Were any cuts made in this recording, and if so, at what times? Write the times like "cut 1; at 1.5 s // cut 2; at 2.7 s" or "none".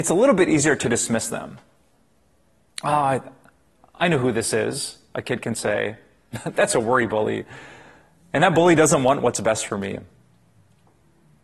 none